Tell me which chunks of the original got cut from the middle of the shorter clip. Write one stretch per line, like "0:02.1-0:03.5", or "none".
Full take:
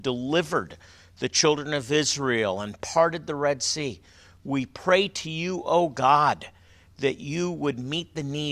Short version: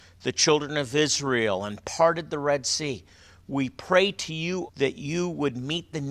0:05.6-0:06.9